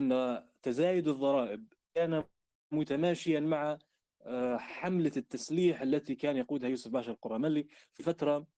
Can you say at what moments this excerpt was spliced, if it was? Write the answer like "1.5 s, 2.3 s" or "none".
none